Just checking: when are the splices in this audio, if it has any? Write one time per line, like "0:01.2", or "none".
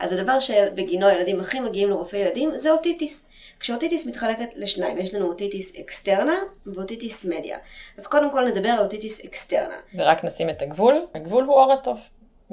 none